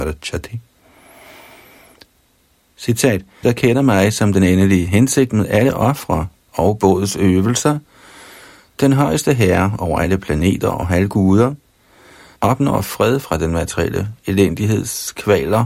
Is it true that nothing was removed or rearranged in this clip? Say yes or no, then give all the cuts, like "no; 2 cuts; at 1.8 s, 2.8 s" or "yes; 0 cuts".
no; 2 cuts; at 3.4 s, 12.4 s